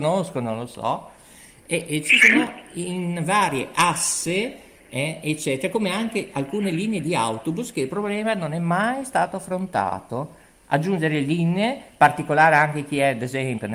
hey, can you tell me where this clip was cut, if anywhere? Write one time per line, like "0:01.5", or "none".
none

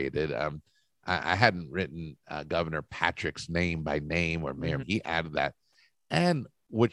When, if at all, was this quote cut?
0:04.8

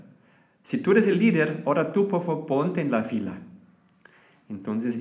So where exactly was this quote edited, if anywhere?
none

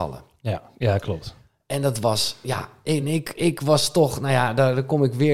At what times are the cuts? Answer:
none

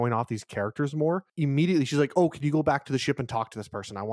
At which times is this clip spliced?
none

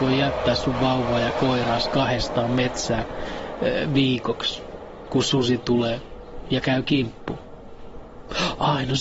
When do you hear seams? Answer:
none

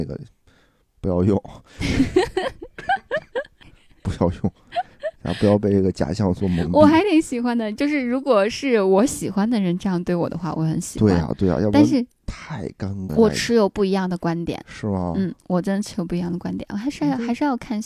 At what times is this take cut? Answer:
0:13.1

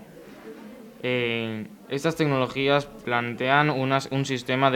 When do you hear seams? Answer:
0:03.0

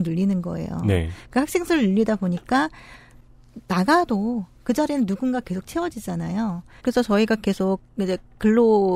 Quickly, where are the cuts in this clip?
0:06.8

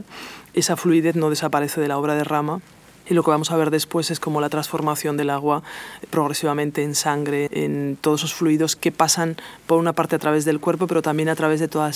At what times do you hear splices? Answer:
0:07.5
0:08.8

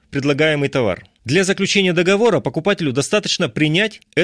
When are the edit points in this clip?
none

